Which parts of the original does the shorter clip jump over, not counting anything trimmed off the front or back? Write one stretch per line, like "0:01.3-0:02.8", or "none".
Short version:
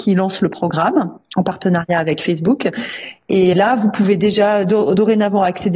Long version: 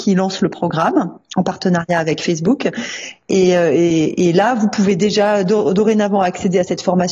0:03.5-0:04.3